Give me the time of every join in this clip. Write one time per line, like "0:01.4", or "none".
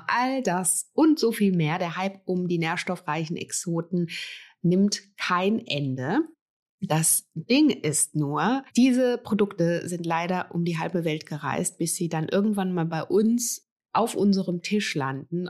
0:08.7